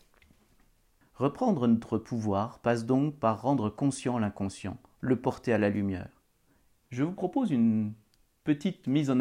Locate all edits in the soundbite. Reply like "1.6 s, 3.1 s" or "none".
1.0 s, 6.8 s